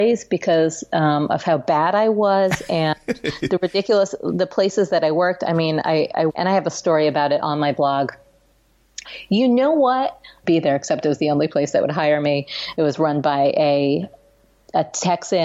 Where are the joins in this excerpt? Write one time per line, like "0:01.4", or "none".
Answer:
0:06.3
0:09.0
0:10.4

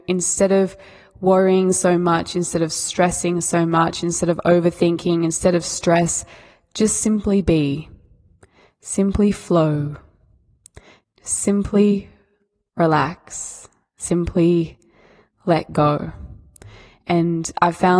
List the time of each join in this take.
none

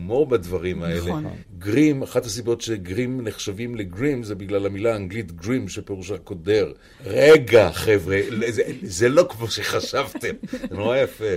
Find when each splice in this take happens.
0:06.9

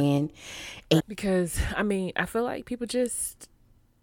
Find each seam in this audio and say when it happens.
0:01.0

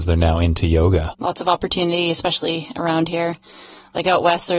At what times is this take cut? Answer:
0:01.1

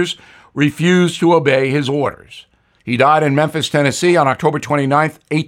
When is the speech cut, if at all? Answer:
0:02.8

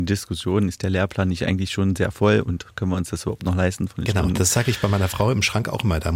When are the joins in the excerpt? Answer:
none

